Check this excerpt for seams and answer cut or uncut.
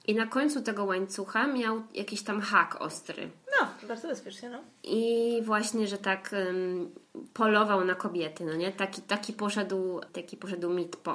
cut